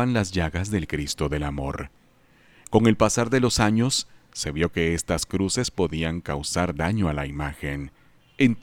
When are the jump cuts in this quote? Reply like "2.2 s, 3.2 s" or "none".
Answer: 2.6 s

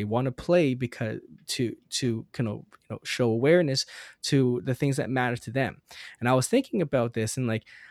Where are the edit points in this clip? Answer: none

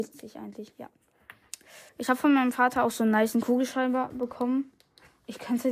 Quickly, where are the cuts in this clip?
1.9 s

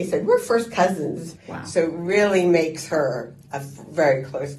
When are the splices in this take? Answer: 1.4 s

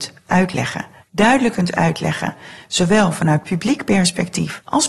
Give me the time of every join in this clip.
1.0 s

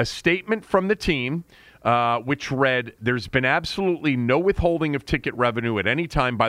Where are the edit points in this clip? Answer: none

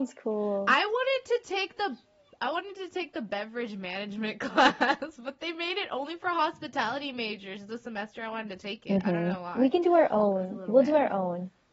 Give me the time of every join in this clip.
none

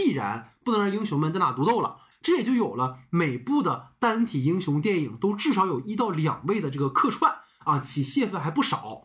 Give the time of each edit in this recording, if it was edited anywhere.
2.1 s

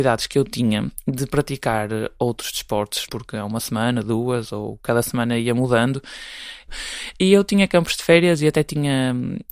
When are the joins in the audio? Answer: 3.1 s, 6.7 s

